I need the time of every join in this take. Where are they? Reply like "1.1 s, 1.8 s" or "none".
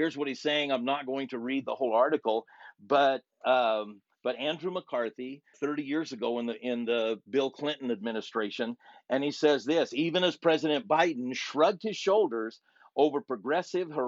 5.5 s